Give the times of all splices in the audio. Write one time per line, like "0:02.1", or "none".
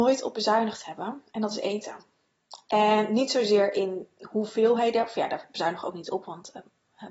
none